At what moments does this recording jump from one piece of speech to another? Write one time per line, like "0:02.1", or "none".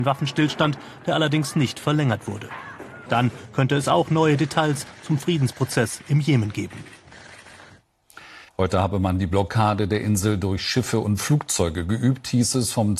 0:03.1
0:08.5